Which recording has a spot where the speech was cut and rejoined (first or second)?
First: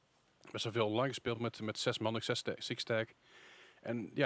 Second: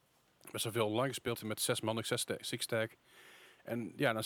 second